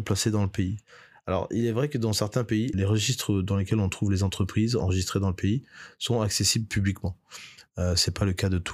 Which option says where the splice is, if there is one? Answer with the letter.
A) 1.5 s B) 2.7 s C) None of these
B